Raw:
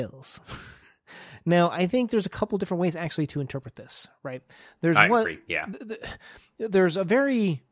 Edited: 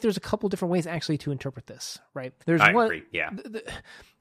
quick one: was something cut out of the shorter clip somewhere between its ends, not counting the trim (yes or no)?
yes